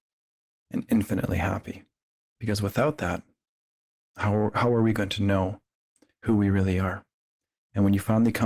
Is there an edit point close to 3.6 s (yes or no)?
no